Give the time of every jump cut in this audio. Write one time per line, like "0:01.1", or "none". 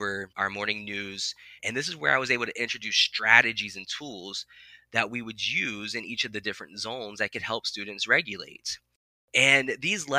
0:01.6